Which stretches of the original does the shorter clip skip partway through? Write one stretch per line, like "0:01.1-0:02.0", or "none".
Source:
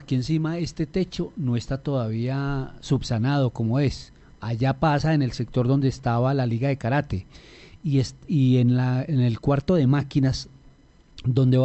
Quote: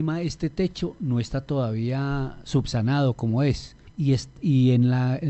0:04.2-0:07.7